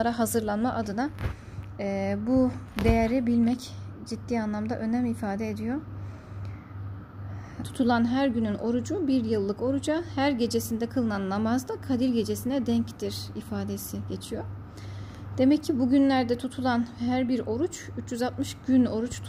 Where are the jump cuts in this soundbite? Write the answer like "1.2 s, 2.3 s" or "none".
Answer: 7.6 s